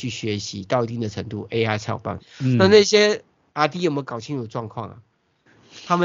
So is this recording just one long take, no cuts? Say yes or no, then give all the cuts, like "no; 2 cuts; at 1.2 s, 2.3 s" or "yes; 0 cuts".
no; 1 cut; at 2.2 s